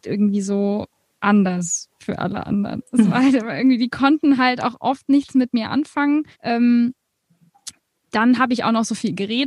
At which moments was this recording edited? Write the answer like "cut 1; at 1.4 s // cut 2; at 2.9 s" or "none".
cut 1; at 6.3 s